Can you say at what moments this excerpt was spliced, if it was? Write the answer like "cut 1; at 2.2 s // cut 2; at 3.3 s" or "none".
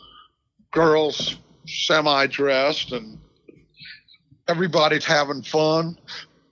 cut 1; at 5.0 s